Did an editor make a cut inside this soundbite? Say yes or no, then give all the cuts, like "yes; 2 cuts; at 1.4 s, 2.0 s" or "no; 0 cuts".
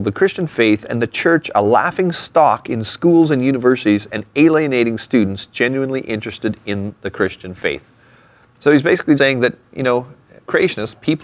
yes; 1 cut; at 9.2 s